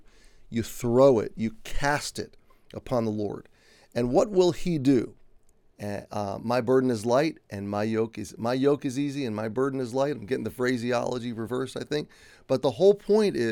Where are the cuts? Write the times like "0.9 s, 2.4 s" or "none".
5.7 s